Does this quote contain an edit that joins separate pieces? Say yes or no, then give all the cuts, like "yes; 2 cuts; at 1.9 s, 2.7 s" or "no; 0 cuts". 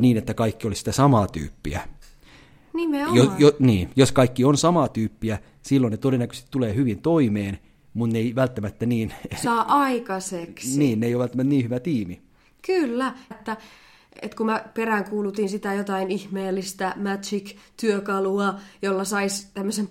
yes; 1 cut; at 13.3 s